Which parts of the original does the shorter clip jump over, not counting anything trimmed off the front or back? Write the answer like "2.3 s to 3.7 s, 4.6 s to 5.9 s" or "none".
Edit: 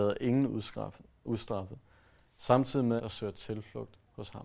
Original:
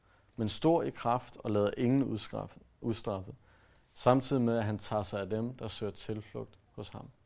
4.5 s to 5.6 s